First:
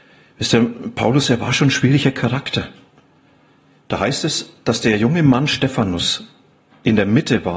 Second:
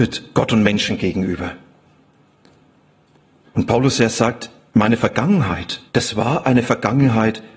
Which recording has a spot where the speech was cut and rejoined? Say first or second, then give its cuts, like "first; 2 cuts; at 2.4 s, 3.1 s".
second; 1 cut; at 5.9 s